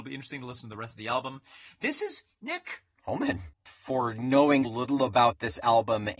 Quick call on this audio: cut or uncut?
cut